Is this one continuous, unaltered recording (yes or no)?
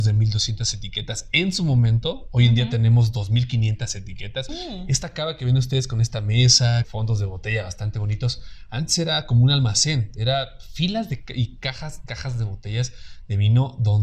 no